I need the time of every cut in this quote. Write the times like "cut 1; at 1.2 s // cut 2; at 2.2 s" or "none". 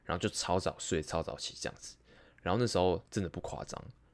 cut 1; at 3.1 s